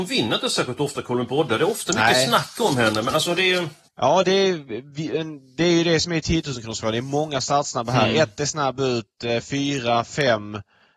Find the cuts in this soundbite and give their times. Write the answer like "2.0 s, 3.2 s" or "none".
3.9 s